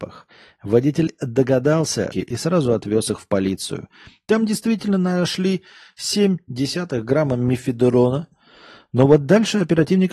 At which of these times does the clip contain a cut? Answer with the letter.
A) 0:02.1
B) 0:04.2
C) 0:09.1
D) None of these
A